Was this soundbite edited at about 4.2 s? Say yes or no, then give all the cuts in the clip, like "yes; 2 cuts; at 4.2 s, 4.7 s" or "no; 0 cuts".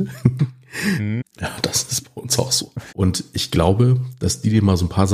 no; 2 cuts; at 1.2 s, 2.9 s